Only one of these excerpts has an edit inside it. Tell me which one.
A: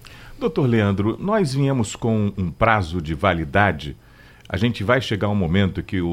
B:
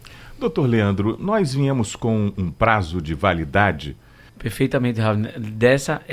B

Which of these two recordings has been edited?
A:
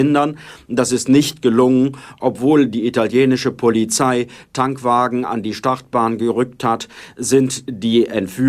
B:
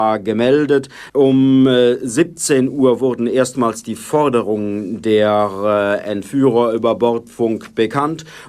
B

